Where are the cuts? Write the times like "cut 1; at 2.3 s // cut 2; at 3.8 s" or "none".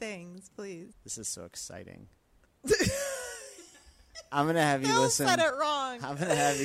cut 1; at 0.9 s // cut 2; at 2.5 s